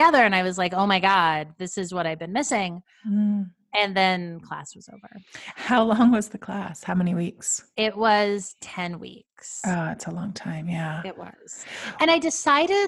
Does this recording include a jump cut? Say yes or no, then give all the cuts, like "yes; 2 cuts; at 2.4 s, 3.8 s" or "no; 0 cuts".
no; 0 cuts